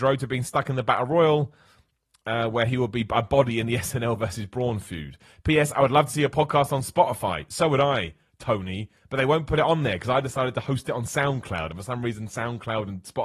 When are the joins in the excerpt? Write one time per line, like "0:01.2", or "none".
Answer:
none